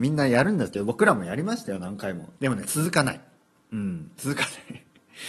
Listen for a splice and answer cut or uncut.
cut